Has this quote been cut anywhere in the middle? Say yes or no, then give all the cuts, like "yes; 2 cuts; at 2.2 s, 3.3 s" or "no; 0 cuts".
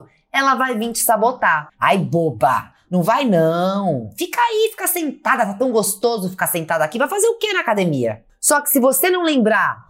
no; 0 cuts